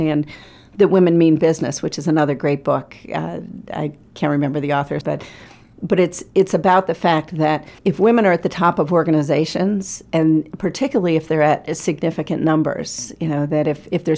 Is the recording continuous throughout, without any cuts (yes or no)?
no